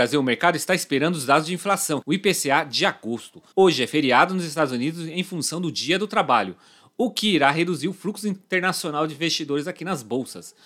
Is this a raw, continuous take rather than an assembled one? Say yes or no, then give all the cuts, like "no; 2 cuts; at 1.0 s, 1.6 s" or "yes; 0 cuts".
no; 2 cuts; at 2.0 s, 3.5 s